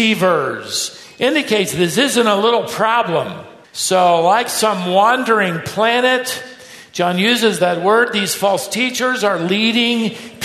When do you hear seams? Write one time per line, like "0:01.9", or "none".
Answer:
0:03.6